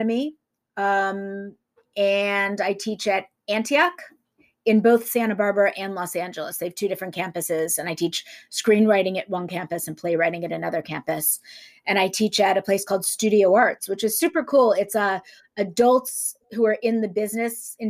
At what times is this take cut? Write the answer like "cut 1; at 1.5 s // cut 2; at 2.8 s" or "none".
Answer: none